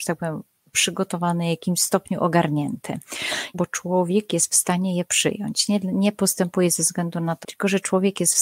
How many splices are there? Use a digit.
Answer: 2